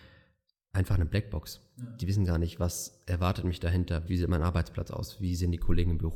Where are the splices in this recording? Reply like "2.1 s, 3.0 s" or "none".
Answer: 4.1 s